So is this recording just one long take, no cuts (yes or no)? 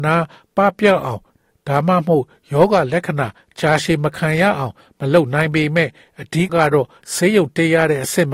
no